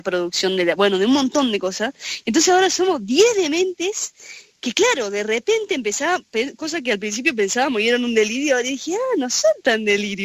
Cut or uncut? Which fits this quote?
uncut